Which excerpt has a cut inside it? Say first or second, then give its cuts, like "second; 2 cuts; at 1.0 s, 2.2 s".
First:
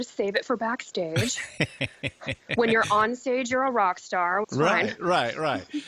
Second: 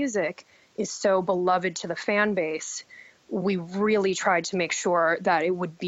first; 1 cut; at 4.4 s